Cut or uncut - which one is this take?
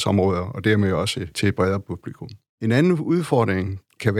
uncut